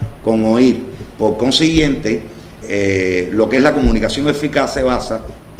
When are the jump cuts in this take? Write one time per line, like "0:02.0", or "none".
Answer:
0:01.1
0:02.6